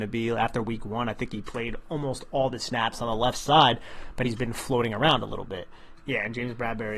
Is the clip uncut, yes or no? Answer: no